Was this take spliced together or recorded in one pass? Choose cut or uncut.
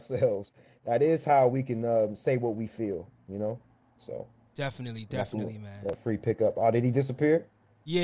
uncut